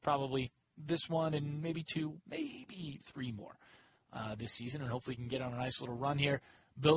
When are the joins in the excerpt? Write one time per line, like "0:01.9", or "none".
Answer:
0:03.0